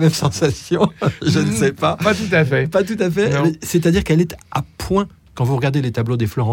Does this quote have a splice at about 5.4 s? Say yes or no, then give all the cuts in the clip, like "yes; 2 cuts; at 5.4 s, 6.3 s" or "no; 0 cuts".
yes; 1 cut; at 5.4 s